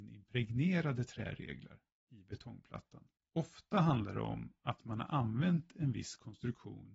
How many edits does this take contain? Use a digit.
1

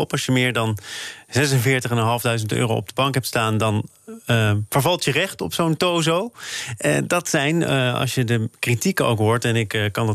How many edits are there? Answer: 0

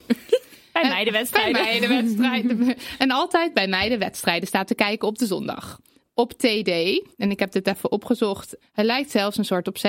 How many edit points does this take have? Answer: 2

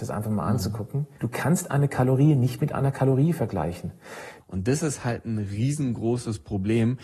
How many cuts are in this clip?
2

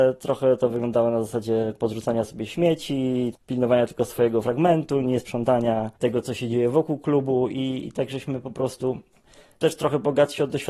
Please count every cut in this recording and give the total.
1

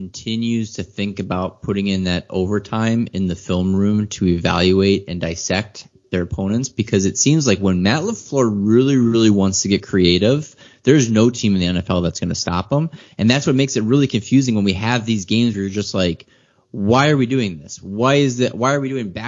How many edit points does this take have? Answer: 0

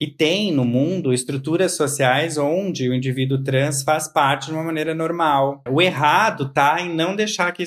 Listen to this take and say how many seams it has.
1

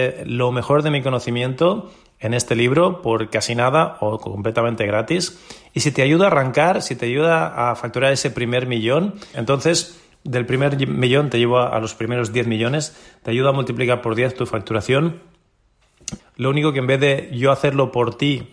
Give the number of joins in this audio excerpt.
2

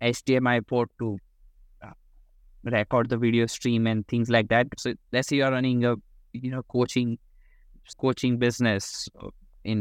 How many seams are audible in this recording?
2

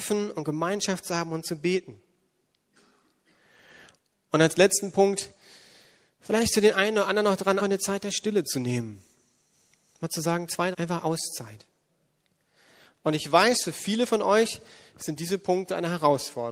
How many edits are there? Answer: 2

